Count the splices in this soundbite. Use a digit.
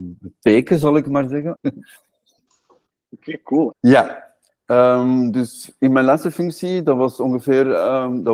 2